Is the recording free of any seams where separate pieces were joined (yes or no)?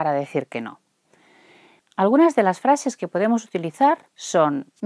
no